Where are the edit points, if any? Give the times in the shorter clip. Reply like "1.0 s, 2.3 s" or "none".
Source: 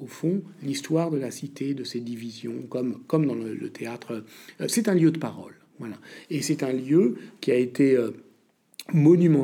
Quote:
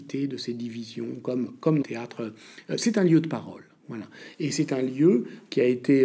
1.8 s